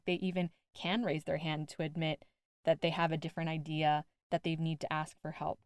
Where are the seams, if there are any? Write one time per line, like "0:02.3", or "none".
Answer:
0:04.2